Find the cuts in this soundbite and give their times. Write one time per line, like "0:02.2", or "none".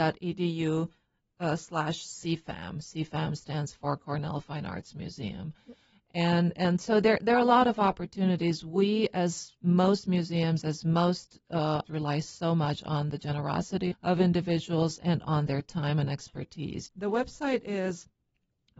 0:11.9
0:13.9
0:16.9